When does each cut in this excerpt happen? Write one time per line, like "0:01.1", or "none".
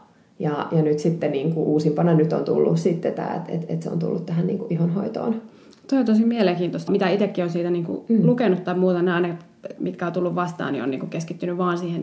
0:06.9
0:09.8

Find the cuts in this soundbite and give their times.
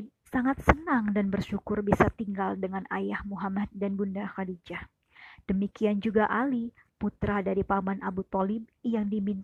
none

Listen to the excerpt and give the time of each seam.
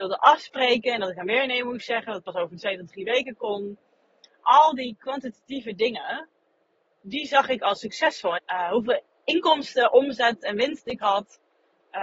0:08.4

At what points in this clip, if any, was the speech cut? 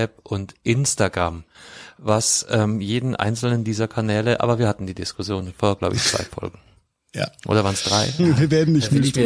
0:08.2

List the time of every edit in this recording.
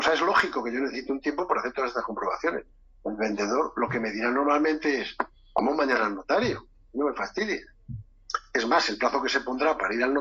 none

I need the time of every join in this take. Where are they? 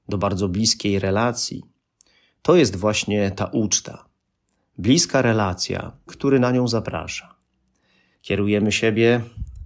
0:06.1
0:08.1

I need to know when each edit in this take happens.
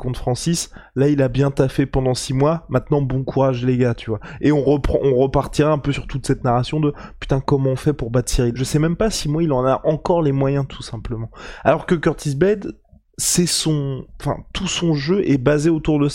0:08.6

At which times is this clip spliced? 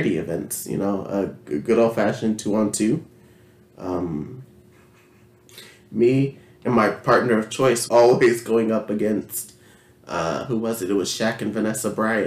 0:07.9

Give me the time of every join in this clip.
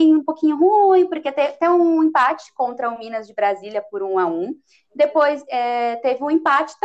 none

